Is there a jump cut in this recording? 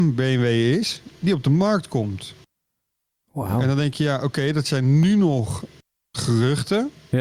no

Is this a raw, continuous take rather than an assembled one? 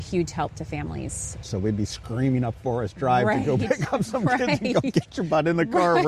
no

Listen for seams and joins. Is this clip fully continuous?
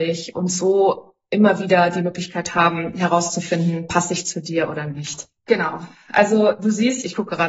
yes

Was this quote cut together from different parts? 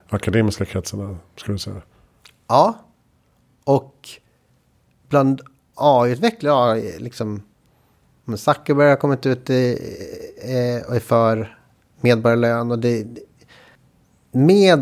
no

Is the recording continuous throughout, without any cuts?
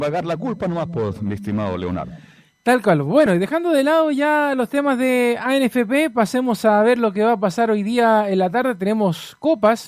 yes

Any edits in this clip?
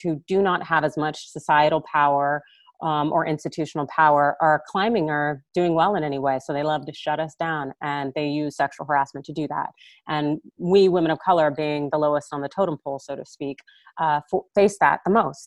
no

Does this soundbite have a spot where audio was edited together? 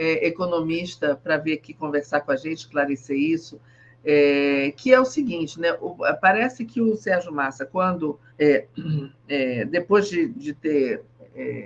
yes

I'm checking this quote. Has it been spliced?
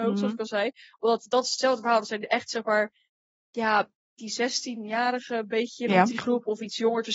no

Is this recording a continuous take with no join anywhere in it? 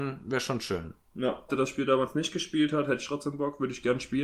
no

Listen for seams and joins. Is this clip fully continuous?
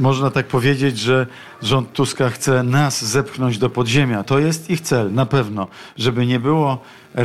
no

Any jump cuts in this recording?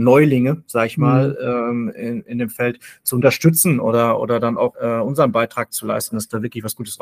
yes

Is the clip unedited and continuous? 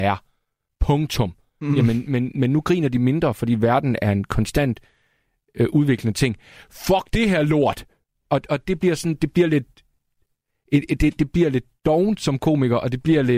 yes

